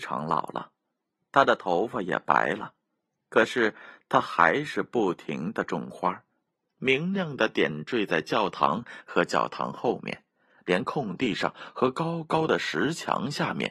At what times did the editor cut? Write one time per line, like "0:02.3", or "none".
0:06.6